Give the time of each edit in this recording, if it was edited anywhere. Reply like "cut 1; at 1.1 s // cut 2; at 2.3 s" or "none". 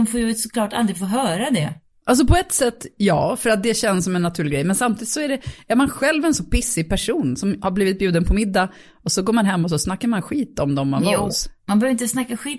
cut 1; at 1.9 s